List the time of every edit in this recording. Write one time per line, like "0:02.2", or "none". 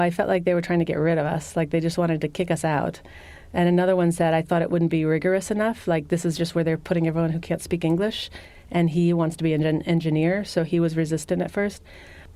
none